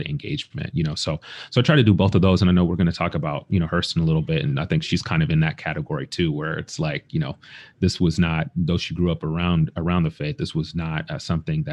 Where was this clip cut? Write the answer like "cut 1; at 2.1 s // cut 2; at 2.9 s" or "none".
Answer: none